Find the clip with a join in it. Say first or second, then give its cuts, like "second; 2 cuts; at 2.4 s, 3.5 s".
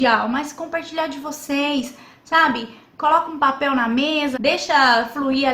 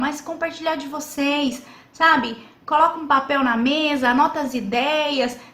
first; 1 cut; at 4.3 s